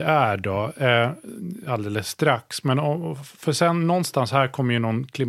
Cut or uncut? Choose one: uncut